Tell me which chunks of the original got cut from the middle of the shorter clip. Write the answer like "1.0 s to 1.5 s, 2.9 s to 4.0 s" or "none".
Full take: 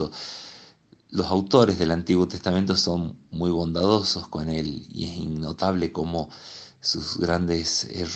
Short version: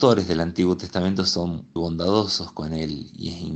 3.3 s to 3.5 s

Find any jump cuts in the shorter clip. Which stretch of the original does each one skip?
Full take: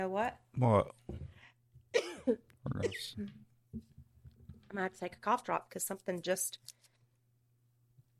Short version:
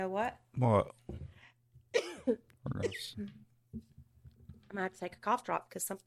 none

